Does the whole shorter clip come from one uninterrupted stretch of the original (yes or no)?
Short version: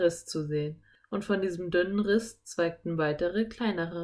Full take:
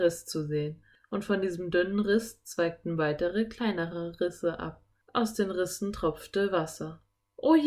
yes